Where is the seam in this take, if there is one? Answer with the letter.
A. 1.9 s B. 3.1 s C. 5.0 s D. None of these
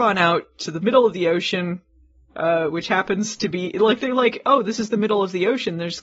D